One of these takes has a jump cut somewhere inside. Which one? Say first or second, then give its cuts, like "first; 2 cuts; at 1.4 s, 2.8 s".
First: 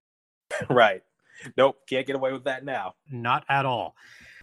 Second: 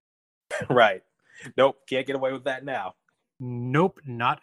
first; 1 cut; at 3.1 s